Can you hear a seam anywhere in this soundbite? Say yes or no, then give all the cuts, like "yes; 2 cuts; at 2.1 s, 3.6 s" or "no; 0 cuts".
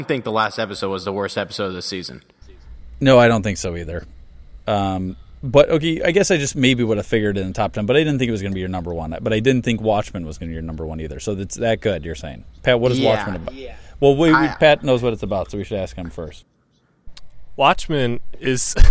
no; 0 cuts